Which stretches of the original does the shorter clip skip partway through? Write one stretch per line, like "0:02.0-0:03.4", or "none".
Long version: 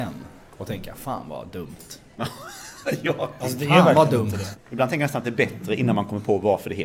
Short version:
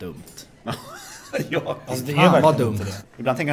none